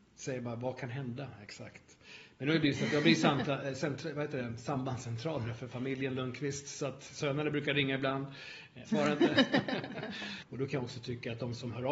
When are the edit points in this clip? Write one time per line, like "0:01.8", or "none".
0:08.9
0:10.4

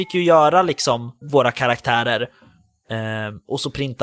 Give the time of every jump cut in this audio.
0:01.2

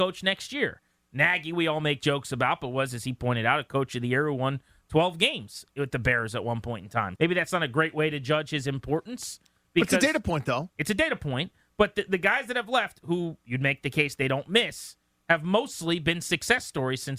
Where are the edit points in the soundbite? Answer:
0:07.2

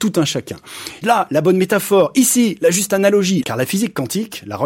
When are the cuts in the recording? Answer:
0:01.0
0:03.4

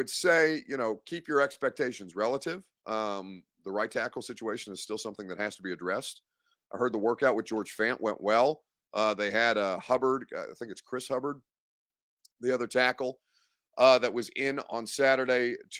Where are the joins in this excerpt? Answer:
none

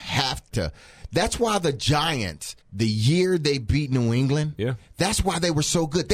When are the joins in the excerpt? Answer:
0:02.6

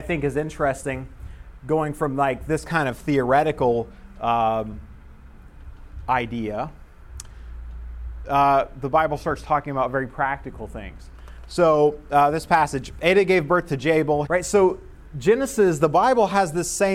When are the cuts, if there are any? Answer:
0:08.2
0:14.3

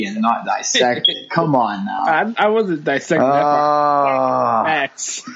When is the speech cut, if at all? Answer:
none

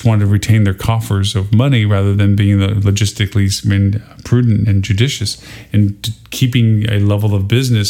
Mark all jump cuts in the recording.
none

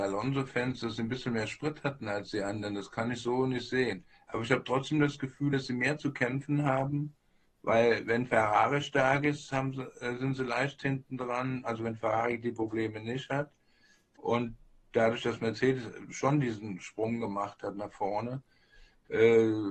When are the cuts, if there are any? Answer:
none

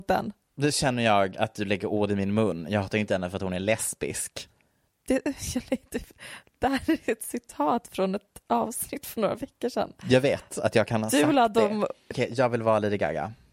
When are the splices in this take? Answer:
0:12.1

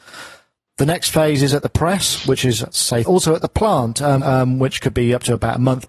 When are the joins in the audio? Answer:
0:03.0
0:04.2

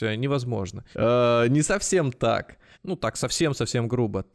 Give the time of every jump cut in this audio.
0:00.9
0:02.7

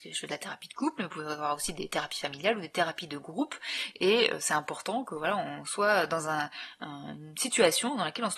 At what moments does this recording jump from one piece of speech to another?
none

